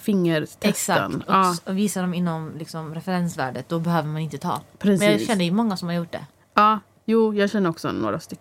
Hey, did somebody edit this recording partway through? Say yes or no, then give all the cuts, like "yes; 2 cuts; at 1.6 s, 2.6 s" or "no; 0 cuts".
no; 0 cuts